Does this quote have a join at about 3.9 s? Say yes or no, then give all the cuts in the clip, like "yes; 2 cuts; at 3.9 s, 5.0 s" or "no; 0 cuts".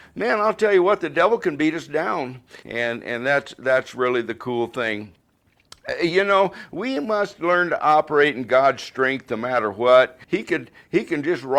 no; 2 cuts; at 2.6 s, 10.2 s